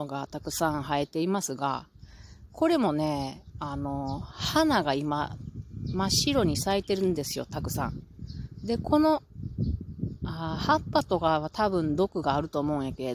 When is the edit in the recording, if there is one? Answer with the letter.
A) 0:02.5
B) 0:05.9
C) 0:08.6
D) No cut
D